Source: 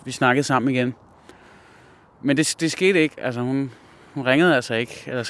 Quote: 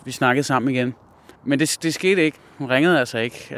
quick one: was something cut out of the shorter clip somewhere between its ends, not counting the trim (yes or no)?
yes